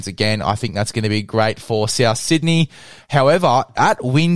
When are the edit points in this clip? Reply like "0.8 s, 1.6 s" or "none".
3.0 s